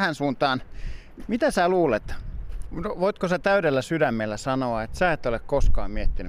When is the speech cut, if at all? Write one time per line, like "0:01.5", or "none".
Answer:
0:01.2
0:02.7